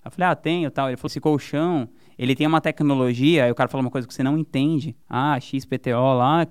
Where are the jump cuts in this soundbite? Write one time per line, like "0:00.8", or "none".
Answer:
0:01.1
0:05.0